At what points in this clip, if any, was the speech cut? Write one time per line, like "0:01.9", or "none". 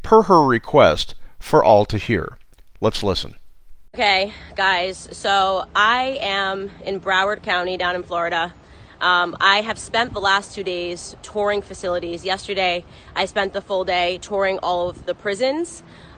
none